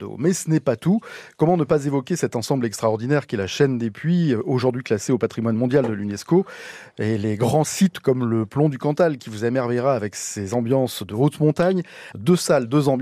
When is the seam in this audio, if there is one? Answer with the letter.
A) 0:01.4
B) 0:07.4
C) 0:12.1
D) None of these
C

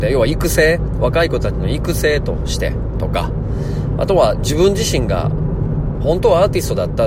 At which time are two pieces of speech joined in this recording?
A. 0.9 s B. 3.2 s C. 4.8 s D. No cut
D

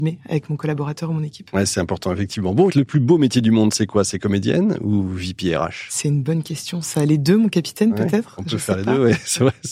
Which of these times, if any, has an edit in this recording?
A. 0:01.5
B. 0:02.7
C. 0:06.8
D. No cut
B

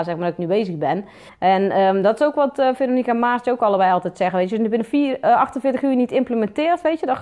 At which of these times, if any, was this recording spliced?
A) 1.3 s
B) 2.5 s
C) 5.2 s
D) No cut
A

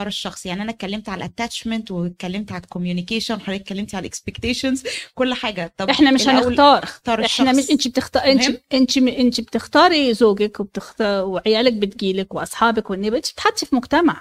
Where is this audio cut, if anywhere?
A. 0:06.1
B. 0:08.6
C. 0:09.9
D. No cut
D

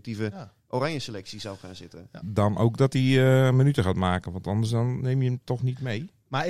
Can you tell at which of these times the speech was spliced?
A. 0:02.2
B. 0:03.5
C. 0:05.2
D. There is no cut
A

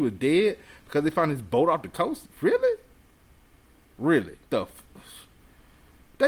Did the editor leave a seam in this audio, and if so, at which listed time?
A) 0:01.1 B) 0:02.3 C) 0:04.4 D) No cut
C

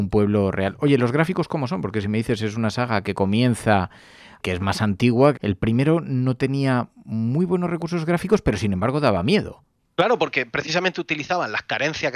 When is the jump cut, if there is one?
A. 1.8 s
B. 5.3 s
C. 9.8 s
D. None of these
B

